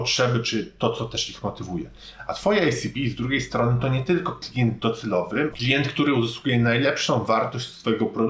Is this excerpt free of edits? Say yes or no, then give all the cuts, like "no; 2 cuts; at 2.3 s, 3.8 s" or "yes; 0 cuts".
no; 1 cut; at 5.5 s